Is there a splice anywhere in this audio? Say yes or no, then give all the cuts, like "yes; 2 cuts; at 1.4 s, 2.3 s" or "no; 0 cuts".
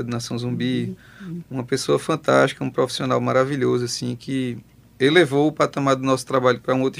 yes; 1 cut; at 1.4 s